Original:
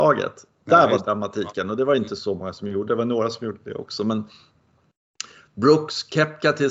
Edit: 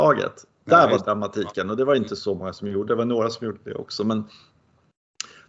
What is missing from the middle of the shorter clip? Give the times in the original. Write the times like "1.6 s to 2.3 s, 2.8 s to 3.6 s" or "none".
none